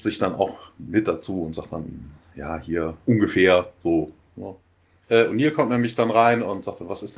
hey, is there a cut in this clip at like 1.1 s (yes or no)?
no